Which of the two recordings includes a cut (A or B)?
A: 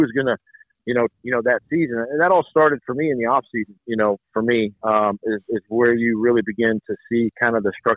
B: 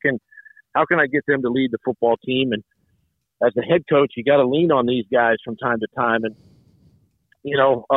A